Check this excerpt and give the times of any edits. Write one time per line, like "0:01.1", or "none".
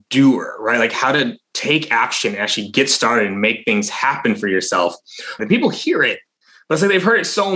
0:05.4

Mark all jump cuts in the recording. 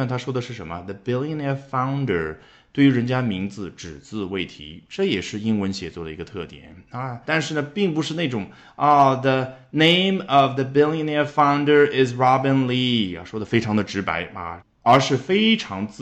0:07.2
0:14.6

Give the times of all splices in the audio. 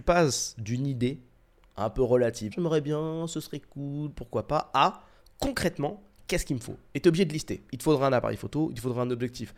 0:02.5

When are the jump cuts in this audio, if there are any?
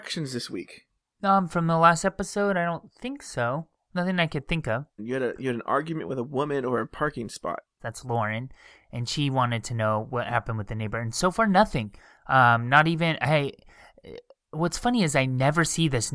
0:05.0
0:07.8

